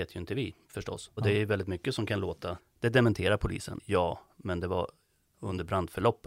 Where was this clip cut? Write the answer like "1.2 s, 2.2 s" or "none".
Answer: 1.2 s, 2.6 s, 3.8 s